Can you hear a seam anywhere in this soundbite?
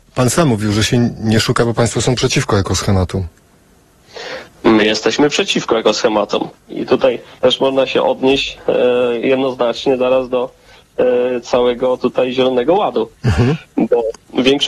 yes; 1 cut; at 6.5 s

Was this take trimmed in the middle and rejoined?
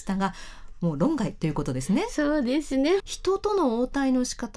yes; 1 cut; at 3.0 s

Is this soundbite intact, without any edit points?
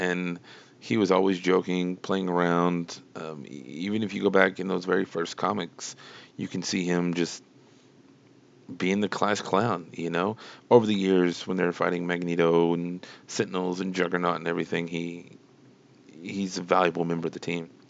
no; 1 cut; at 10.6 s

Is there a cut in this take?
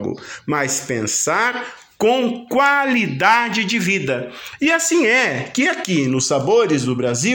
no; 0 cuts

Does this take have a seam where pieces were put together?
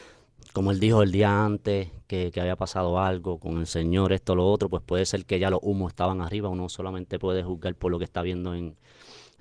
yes; 1 cut; at 3.4 s

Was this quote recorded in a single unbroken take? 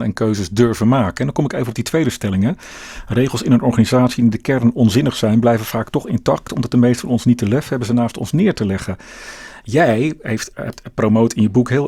yes; 0 cuts

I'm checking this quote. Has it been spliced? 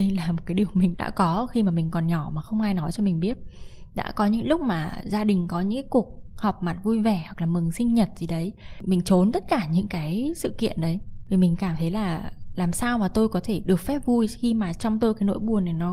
yes; 1 cut; at 0.9 s

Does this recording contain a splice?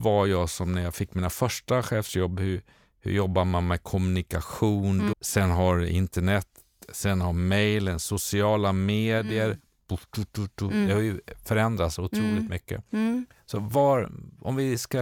yes; 1 cut; at 5.1 s

